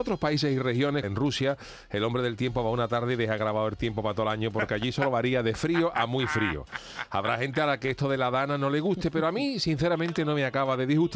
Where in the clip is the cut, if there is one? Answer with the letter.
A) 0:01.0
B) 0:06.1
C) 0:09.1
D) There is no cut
A